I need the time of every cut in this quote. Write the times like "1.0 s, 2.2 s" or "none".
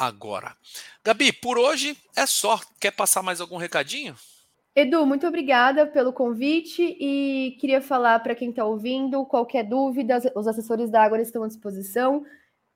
none